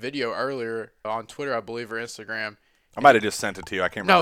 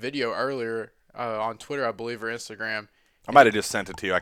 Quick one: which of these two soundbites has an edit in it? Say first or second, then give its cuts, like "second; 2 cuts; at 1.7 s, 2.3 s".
first; 1 cut; at 1.0 s